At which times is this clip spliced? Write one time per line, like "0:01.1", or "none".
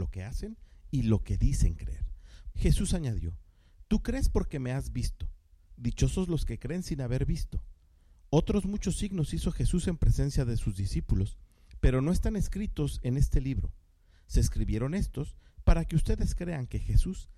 0:02.5